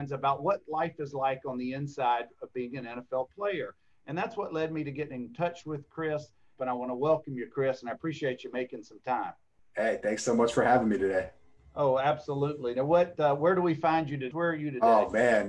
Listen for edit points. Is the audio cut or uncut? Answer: cut